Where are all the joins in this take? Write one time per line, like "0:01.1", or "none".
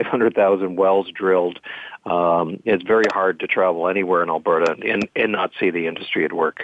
none